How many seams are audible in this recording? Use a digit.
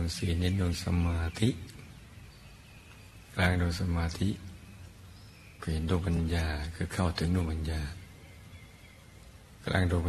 0